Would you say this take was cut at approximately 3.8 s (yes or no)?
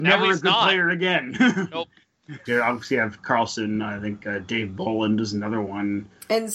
no